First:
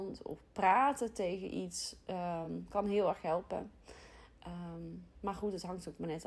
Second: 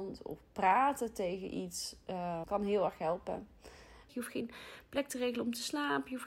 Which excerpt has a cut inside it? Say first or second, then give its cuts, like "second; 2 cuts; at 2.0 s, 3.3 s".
second; 2 cuts; at 2.4 s, 4.1 s